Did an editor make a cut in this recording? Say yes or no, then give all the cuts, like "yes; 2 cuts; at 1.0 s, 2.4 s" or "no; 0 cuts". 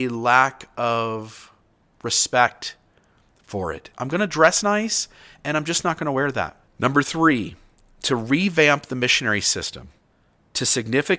yes; 2 cuts; at 3.9 s, 6.6 s